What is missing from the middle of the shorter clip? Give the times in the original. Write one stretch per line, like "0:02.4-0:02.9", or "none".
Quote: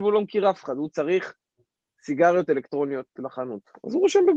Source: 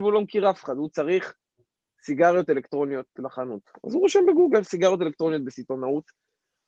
none